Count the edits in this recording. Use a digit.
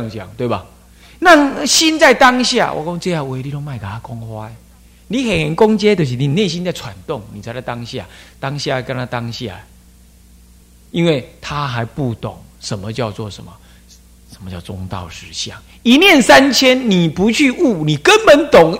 0